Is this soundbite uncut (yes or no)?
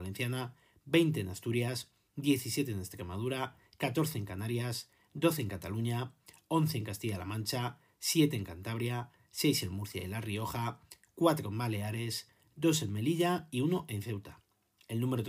yes